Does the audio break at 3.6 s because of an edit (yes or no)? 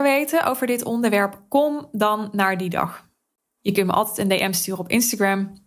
yes